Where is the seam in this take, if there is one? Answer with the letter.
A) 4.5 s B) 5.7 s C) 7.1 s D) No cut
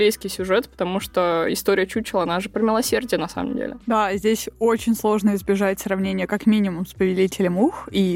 D